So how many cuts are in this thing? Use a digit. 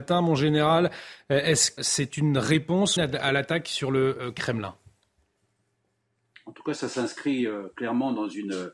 2